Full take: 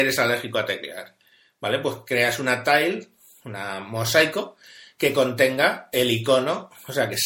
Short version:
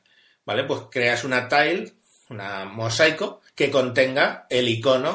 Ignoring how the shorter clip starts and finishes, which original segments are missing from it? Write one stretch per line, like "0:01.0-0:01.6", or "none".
0:04.6-0:04.9